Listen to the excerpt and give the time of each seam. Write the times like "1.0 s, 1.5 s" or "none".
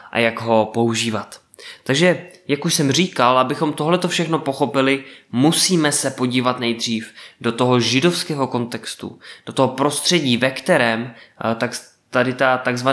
none

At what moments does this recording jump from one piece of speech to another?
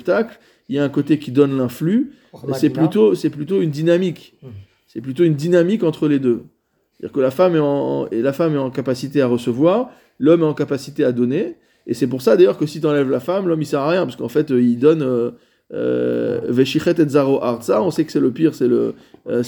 none

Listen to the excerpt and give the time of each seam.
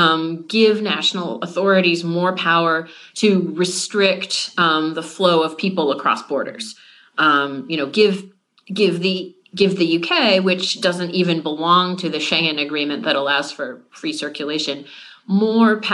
none

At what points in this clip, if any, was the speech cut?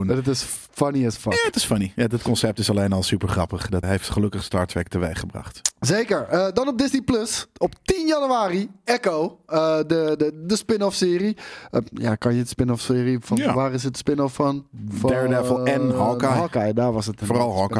3.8 s

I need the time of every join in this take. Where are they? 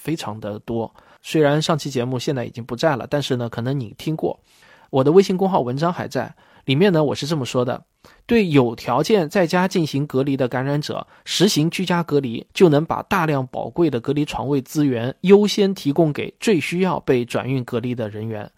1.2 s, 12.5 s

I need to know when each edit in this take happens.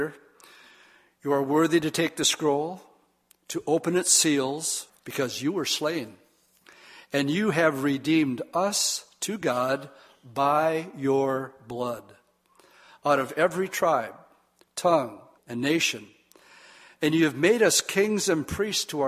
4.9 s, 15.4 s

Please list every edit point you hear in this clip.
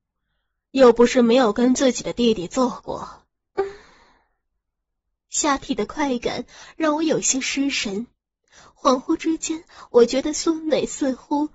3.5 s

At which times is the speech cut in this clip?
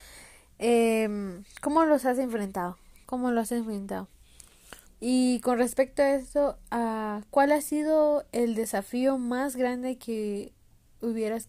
4.9 s

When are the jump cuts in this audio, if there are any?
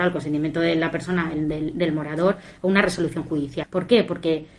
3.6 s

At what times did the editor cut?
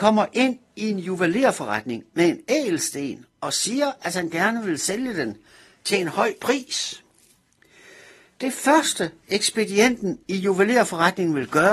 none

